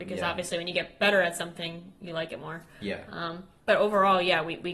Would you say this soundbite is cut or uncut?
uncut